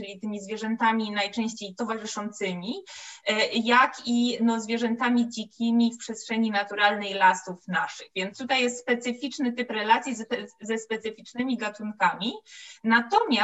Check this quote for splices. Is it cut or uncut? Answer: uncut